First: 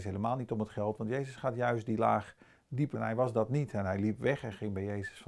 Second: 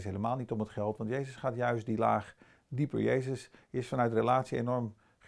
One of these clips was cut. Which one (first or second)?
first